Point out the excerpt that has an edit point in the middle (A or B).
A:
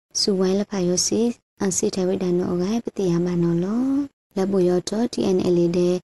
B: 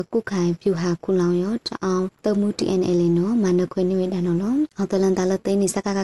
B